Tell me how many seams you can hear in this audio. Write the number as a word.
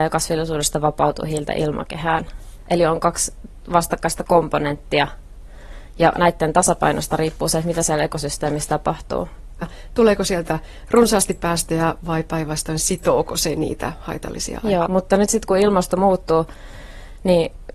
two